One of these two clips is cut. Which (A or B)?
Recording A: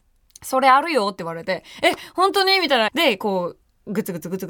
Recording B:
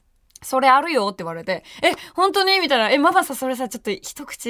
A